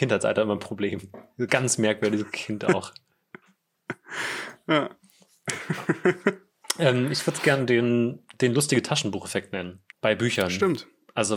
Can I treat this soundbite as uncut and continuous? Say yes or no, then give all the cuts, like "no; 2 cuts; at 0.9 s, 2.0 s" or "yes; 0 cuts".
no; 1 cut; at 9.9 s